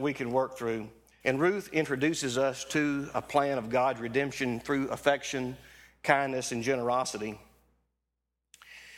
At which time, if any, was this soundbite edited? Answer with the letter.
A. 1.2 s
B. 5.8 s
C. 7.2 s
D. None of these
A